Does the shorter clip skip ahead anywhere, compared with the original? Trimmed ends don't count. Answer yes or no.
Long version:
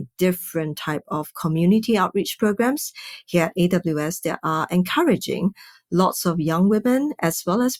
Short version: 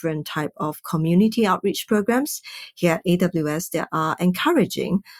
no